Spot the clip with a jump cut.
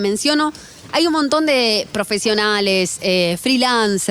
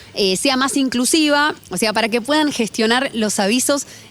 second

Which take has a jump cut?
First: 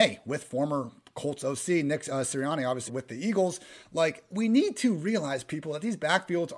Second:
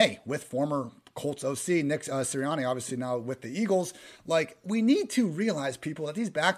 first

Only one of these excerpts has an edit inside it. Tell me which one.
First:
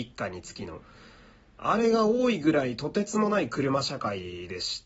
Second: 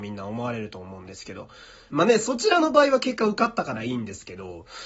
second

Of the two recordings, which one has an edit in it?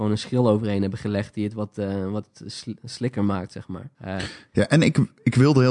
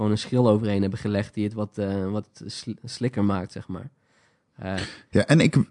first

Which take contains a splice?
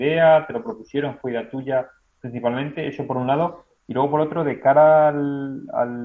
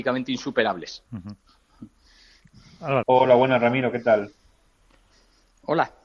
second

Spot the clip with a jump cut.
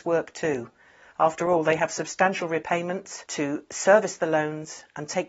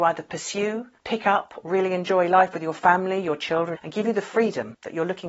second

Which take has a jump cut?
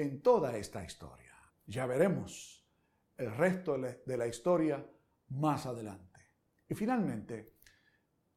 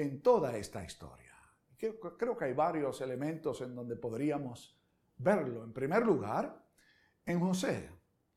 first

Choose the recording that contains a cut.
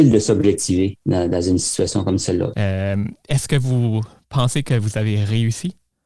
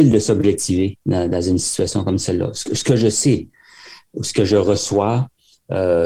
first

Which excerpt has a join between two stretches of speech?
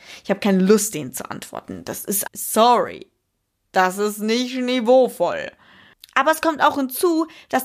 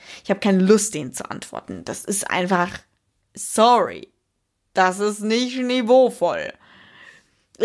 first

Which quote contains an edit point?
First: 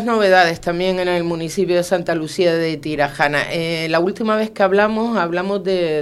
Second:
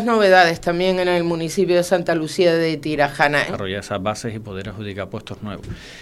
second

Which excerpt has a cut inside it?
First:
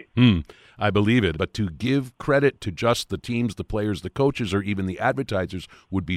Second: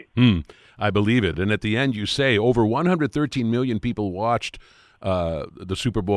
first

